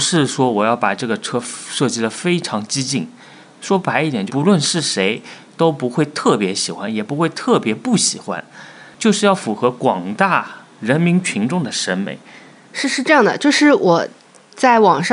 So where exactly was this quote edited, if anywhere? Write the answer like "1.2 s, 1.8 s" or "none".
4.3 s, 12.6 s